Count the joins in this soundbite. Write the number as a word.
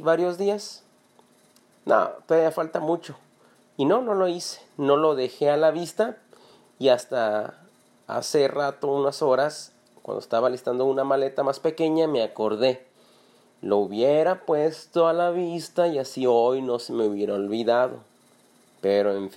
zero